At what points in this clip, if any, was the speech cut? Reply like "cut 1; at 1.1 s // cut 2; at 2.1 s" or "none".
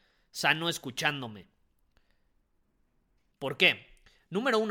cut 1; at 3.3 s

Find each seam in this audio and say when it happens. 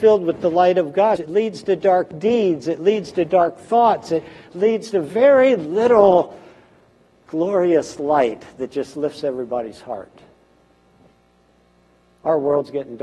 cut 1; at 1.2 s

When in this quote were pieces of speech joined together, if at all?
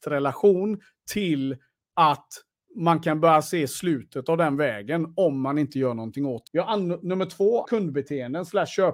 cut 1; at 6.5 s // cut 2; at 7.7 s

